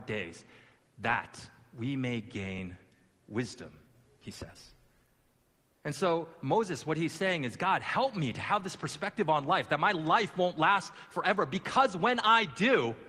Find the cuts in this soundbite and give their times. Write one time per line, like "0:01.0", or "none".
none